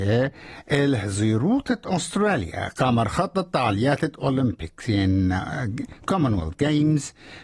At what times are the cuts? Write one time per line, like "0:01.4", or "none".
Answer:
none